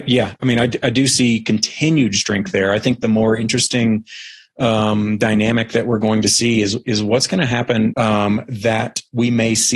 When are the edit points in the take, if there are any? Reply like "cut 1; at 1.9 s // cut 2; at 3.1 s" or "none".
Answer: cut 1; at 7.9 s